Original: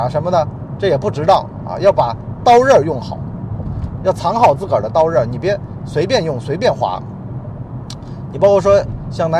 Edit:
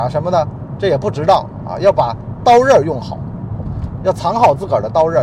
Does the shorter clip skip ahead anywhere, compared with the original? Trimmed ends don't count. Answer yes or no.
no